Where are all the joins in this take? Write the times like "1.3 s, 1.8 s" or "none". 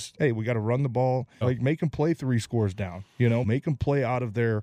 1.4 s, 3.4 s